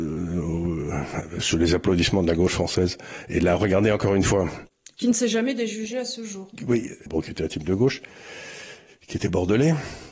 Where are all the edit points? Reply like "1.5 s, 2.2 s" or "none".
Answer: 7.1 s